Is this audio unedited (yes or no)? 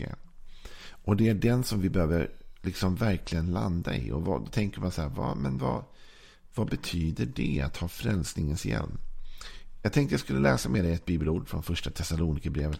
yes